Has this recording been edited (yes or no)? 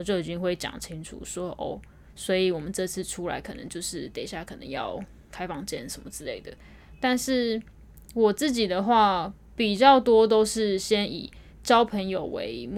no